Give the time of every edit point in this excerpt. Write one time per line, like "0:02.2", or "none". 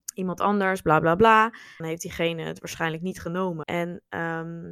0:01.8
0:03.6